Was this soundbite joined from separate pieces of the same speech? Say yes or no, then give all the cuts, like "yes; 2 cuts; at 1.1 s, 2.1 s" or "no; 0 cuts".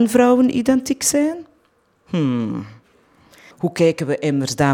yes; 1 cut; at 3.5 s